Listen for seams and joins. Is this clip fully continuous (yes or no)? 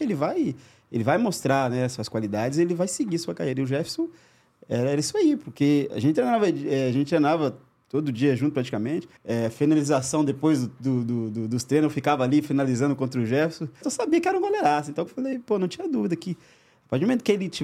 no